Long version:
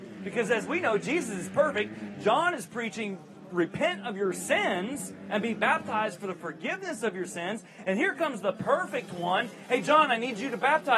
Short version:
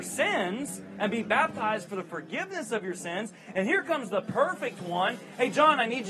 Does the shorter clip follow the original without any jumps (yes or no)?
yes